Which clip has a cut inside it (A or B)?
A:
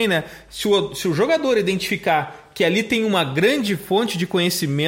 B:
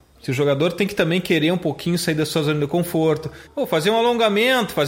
B